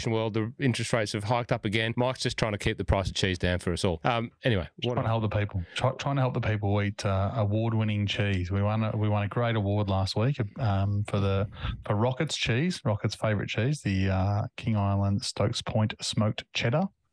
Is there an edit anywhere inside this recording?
no; 0 cuts

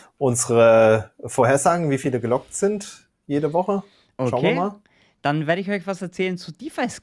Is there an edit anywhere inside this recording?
no; 0 cuts

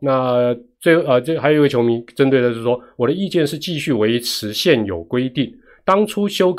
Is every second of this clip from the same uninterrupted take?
yes; 0 cuts

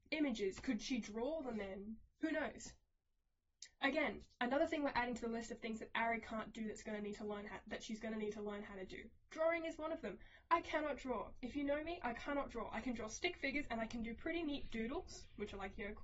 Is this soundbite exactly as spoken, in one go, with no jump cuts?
yes; 0 cuts

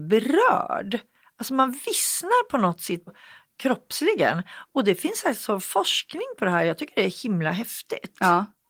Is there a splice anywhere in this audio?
yes; 1 cut; at 3.1 s

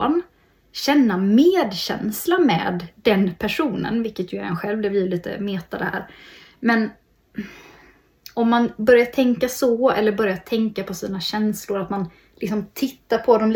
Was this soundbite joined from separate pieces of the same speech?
no; 0 cuts

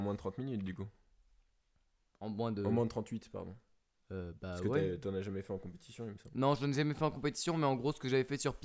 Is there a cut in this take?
no; 0 cuts

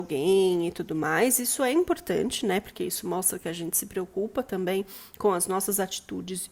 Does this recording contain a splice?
no; 0 cuts

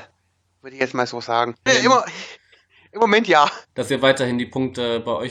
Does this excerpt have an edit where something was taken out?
yes; 2 cuts; at 1.7 s, 3.7 s

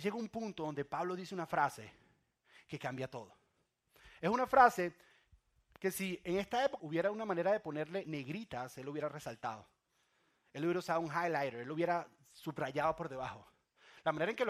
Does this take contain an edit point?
yes; 1 cut; at 6.8 s

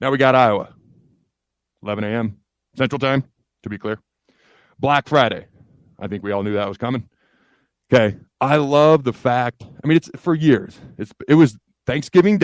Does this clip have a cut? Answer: no; 0 cuts

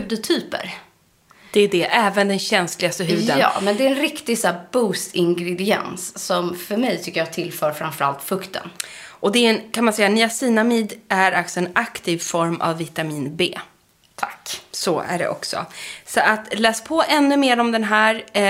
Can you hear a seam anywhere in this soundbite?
no; 0 cuts

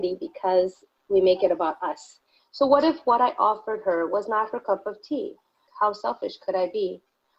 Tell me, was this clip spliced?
yes; 2 cuts; at 2.4 s, 5.7 s

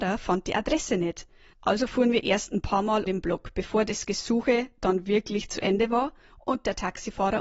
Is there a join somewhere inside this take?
yes; 1 cut; at 3.1 s

